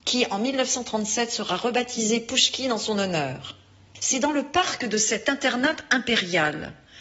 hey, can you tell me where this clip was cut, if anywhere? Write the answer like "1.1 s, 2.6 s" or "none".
none